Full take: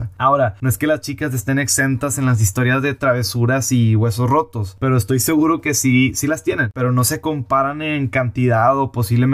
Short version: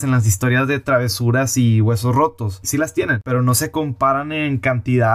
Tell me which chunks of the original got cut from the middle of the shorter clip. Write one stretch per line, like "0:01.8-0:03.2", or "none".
0:04.8-0:06.1